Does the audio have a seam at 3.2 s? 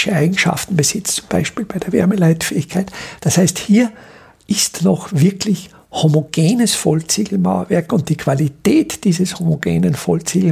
yes; 1 cut; at 3.2 s

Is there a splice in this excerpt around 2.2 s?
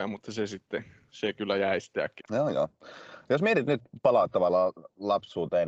yes; 1 cut; at 2.2 s

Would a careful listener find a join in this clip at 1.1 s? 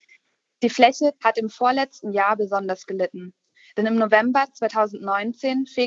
yes; 1 cut; at 1.1 s

